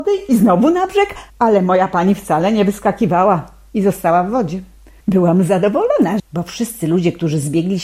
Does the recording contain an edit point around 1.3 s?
no; 2 cuts; at 5.0 s, 6.2 s

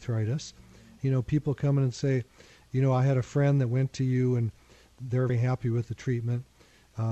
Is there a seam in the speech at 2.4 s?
no; 2 cuts; at 1.0 s, 5.3 s

